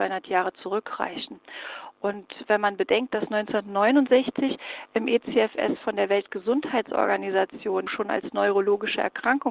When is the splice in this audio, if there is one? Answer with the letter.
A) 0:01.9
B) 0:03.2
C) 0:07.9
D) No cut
C